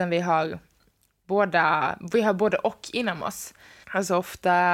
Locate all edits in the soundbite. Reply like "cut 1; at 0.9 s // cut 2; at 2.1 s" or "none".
cut 1; at 3.8 s